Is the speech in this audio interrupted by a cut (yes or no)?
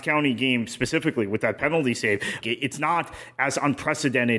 yes